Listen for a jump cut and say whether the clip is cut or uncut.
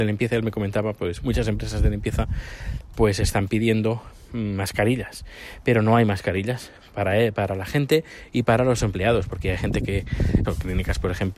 cut